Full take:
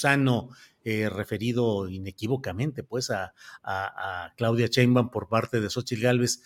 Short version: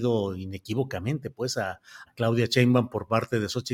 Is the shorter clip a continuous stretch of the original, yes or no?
no